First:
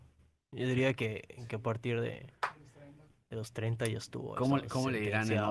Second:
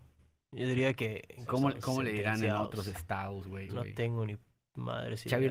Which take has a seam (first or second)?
second